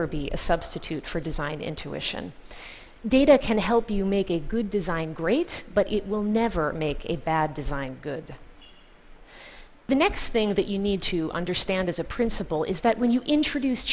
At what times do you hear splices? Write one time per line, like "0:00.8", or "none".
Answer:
none

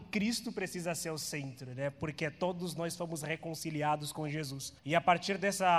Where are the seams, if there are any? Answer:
0:04.8

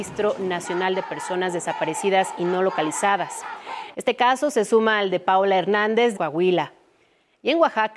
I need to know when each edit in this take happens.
0:03.9
0:06.1

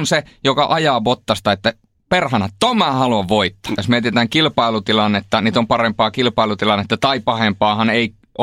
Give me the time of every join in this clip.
0:03.8

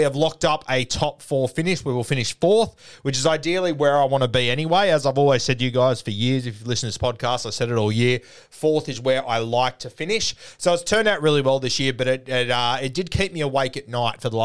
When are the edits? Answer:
none

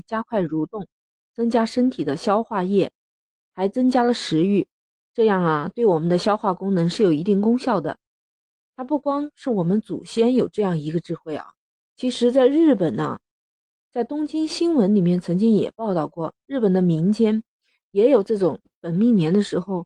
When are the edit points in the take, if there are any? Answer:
none

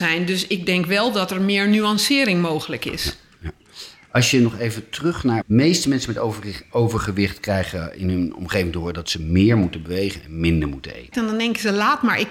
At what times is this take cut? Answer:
0:05.4
0:11.1

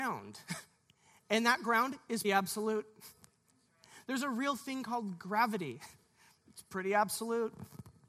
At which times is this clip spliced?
0:02.2

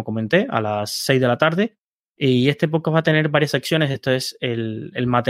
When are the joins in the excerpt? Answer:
none

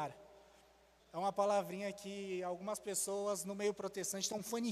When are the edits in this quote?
0:01.0

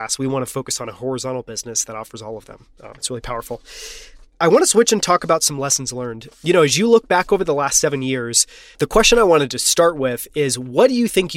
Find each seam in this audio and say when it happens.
0:08.7

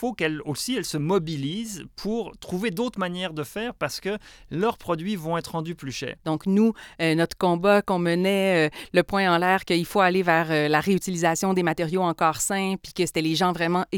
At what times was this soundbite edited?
0:06.2

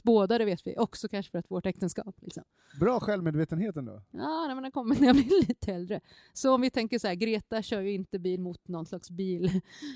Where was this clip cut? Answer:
none

